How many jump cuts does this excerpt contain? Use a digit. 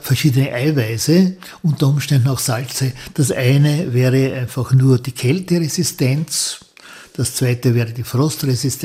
1